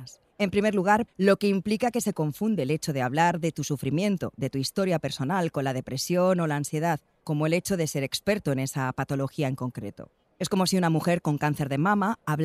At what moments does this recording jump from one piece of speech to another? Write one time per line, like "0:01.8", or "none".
0:01.1
0:07.2